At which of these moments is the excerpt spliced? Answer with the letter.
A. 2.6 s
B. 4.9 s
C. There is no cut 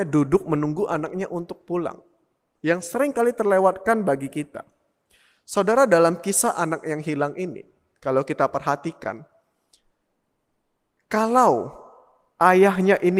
A